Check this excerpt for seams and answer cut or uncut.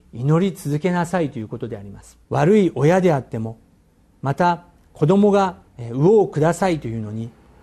cut